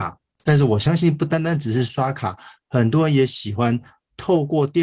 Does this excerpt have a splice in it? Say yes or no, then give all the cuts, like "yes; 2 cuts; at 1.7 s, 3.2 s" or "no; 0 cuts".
no; 0 cuts